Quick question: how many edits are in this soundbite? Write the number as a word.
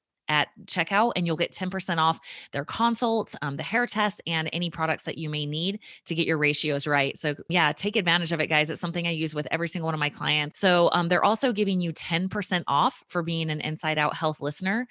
one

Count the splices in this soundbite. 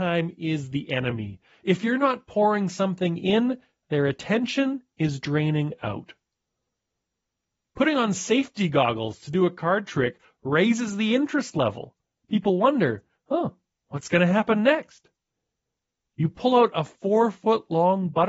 zero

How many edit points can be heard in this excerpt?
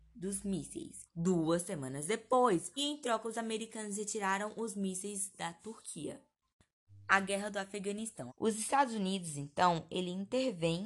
three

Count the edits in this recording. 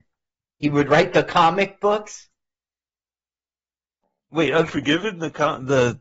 zero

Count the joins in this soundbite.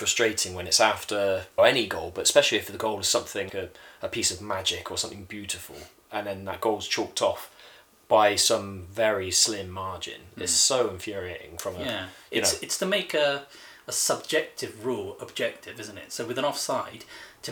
two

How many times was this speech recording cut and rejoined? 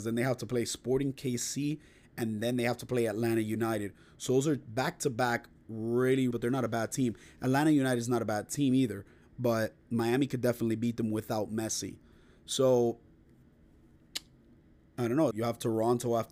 two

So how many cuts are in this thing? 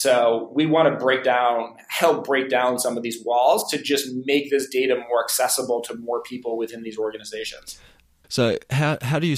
one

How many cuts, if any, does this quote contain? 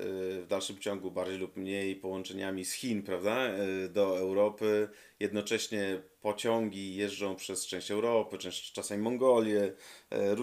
zero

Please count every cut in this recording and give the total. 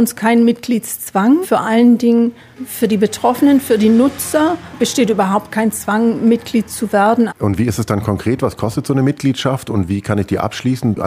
two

